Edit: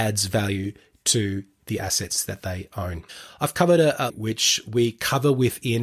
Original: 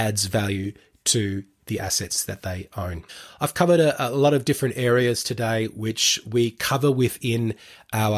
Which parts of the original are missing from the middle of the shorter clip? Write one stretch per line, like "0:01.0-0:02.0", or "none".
0:04.1-0:05.7